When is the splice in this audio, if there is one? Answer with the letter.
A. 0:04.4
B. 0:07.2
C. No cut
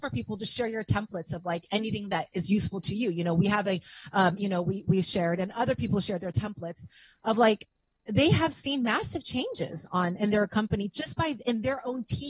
A